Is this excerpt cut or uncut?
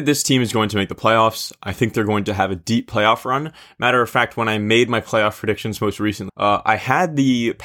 cut